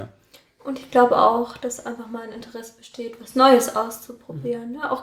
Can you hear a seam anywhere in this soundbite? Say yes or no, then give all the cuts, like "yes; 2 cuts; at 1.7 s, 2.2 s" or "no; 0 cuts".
no; 0 cuts